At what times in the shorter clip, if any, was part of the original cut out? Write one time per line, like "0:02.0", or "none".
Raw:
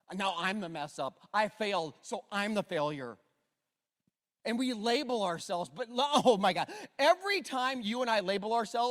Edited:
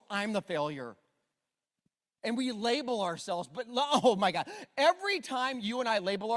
none